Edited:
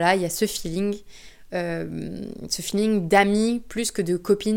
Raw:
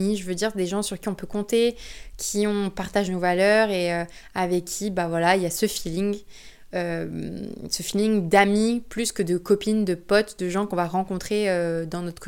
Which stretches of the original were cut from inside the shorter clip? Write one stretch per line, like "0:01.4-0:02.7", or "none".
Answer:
none